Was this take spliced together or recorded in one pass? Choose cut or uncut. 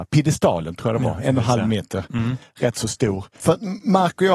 cut